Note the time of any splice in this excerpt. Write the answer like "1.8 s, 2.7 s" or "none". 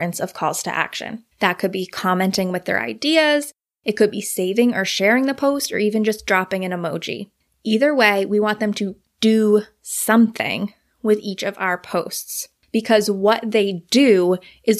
1.3 s